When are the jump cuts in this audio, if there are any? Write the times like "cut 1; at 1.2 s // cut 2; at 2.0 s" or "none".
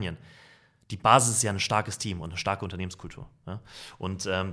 none